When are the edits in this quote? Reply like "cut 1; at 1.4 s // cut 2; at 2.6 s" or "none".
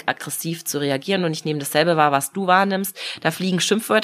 none